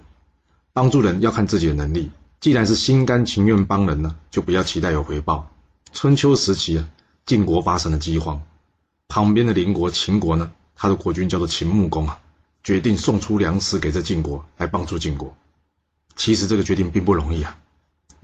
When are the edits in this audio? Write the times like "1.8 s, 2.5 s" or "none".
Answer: 2.4 s, 5.8 s, 12.6 s